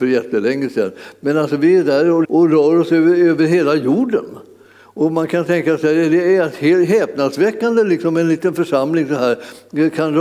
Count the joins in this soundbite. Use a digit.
1